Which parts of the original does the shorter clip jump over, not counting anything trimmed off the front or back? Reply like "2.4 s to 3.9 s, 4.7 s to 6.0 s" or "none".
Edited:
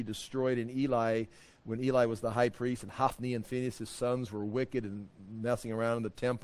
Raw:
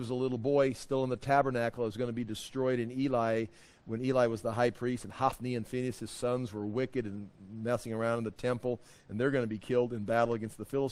none